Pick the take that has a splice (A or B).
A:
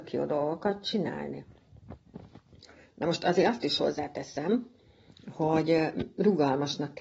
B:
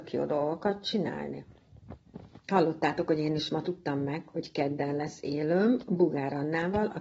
B